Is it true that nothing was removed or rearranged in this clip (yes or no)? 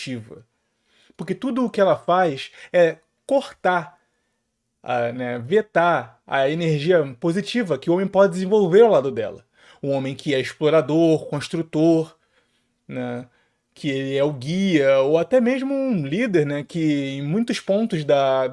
yes